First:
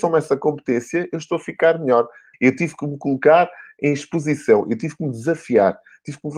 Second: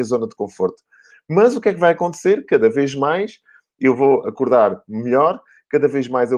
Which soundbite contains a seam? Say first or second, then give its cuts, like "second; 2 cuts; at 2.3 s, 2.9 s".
first; 1 cut; at 2.3 s